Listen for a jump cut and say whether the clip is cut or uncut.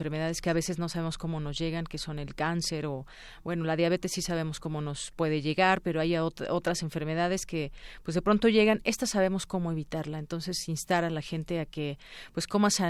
uncut